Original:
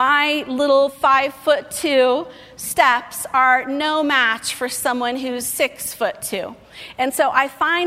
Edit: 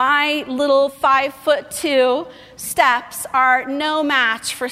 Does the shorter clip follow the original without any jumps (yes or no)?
yes